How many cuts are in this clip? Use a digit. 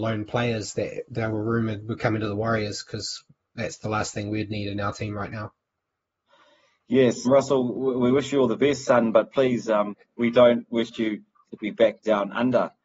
1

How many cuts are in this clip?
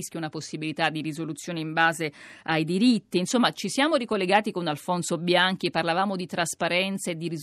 0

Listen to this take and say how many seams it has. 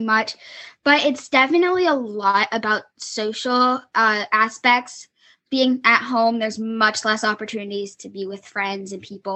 0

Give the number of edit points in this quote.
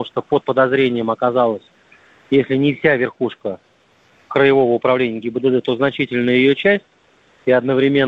0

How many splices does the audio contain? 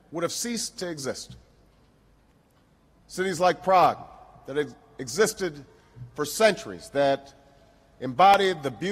1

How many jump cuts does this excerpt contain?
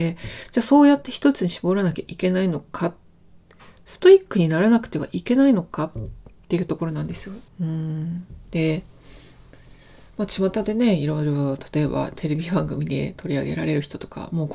1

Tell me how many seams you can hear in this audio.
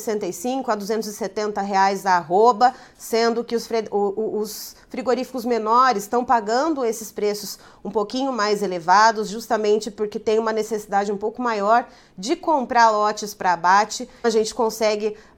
1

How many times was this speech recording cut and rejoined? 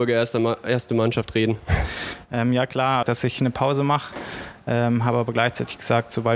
1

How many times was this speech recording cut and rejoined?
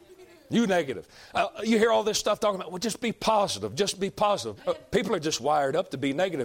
1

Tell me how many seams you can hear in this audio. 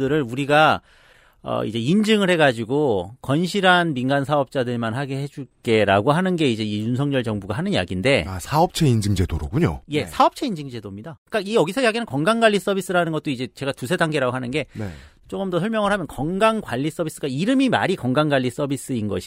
0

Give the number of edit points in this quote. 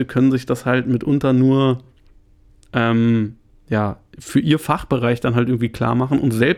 0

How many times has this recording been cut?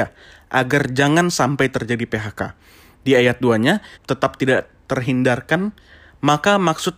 1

